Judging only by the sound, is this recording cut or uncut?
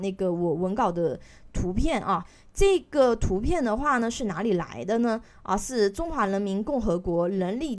uncut